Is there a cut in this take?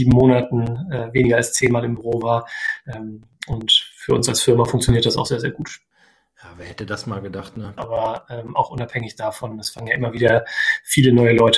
yes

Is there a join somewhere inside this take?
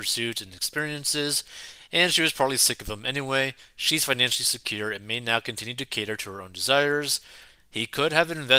yes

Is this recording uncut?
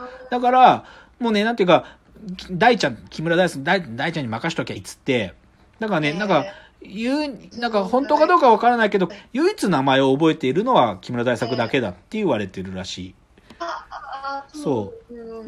no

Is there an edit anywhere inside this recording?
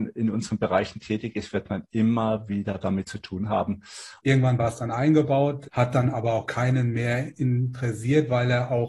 yes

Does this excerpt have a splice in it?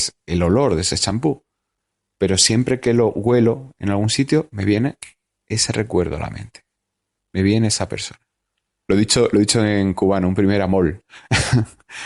yes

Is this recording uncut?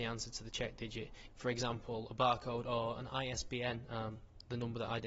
no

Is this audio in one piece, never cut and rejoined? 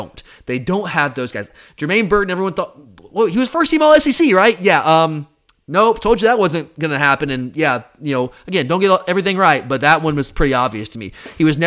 yes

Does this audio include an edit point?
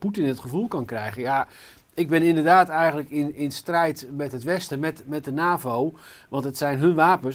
no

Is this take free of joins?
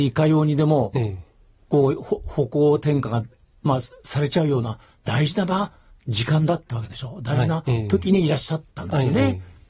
yes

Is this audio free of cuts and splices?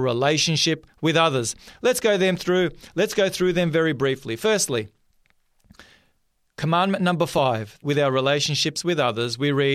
no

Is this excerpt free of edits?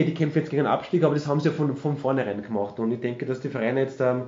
yes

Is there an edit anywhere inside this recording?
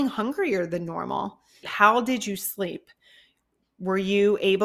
yes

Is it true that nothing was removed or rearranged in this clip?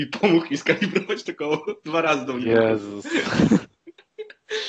yes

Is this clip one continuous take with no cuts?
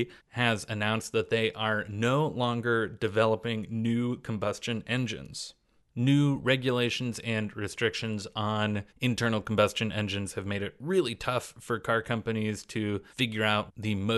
yes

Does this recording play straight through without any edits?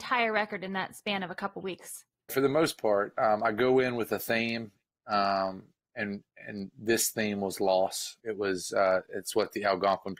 no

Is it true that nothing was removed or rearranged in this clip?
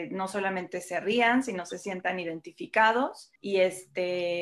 no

